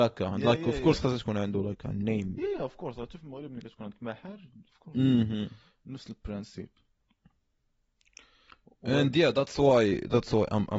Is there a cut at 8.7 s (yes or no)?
no